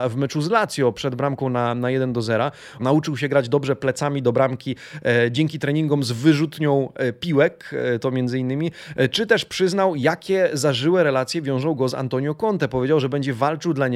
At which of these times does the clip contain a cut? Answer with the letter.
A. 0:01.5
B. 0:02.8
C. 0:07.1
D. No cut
B